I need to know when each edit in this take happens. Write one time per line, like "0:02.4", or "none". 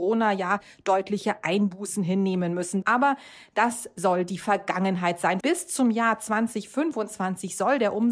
0:02.8
0:05.4